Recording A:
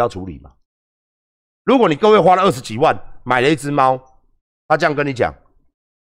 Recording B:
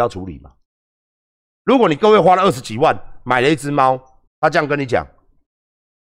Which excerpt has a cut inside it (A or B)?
B